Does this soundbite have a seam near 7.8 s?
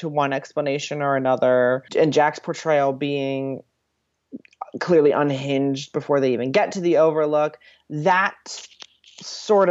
no; 1 cut; at 1.9 s

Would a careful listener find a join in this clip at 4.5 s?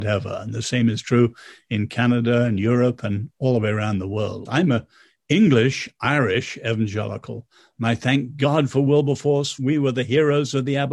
yes; 1 cut; at 4.5 s

